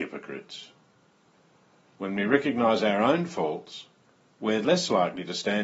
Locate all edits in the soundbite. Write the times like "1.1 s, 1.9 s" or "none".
none